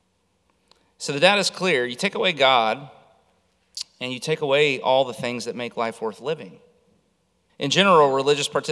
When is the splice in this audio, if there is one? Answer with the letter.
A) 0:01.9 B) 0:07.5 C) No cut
B